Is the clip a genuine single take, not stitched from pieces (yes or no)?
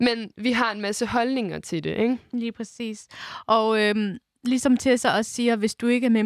yes